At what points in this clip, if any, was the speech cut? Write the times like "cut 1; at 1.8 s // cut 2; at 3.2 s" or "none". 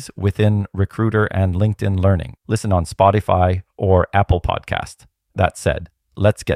cut 1; at 2.4 s